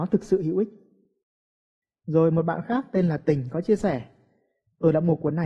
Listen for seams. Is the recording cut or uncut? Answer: uncut